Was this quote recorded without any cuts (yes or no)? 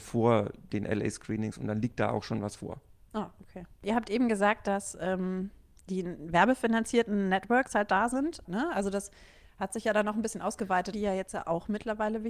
no